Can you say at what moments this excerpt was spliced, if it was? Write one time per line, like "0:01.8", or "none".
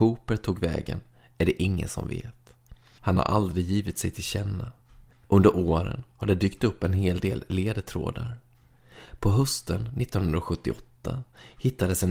0:05.1